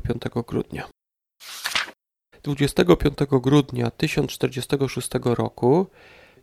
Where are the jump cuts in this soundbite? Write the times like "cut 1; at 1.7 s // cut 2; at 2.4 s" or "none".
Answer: cut 1; at 2.3 s